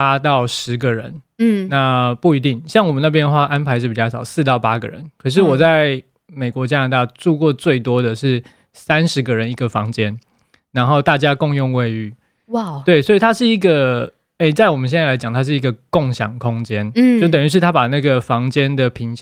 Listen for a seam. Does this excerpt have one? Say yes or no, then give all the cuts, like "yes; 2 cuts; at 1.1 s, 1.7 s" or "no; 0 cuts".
no; 0 cuts